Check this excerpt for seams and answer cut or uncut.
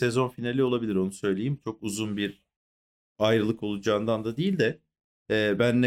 uncut